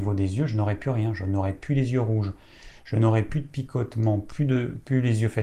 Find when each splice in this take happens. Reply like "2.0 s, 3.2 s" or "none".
none